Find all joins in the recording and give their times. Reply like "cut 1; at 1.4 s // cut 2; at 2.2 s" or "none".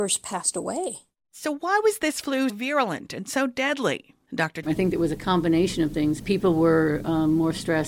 cut 1; at 2.5 s // cut 2; at 4.6 s // cut 3; at 6.2 s